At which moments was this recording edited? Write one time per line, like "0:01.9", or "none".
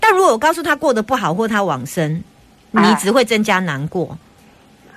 none